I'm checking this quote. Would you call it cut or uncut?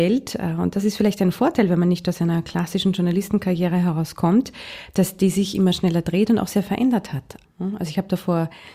cut